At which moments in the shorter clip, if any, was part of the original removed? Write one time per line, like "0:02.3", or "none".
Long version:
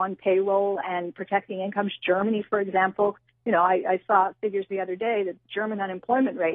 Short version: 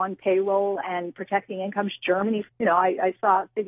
0:02.5